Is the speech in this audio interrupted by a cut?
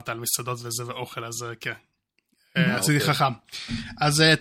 no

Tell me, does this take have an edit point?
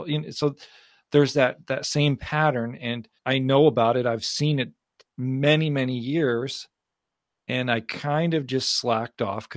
yes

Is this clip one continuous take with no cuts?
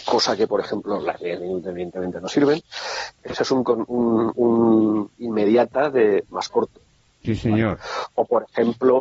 no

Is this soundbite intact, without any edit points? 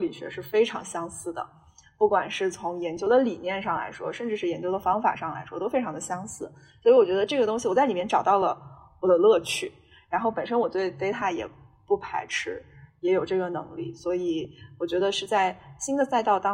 yes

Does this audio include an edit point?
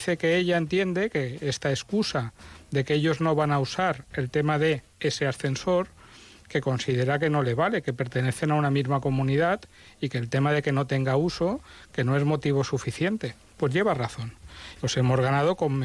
yes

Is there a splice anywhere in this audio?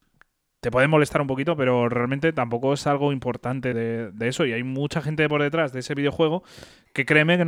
yes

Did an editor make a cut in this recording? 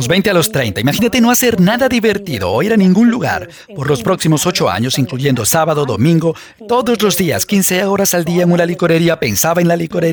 yes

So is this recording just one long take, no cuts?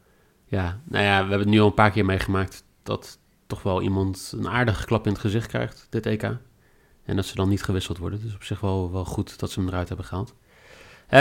yes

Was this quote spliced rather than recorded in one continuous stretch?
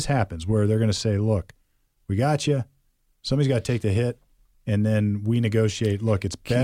no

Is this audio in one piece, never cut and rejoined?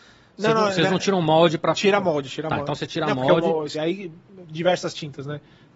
no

